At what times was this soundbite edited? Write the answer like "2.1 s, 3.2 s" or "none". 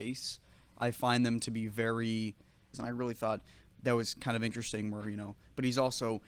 2.7 s